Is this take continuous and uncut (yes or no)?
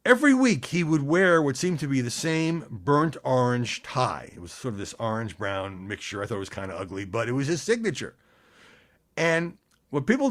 yes